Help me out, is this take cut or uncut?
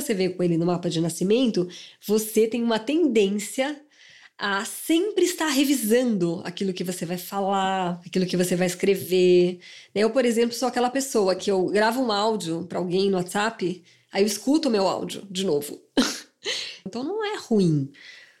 cut